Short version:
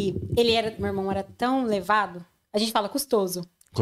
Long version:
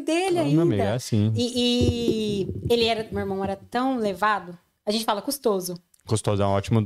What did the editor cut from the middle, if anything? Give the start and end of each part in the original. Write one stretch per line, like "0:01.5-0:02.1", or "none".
none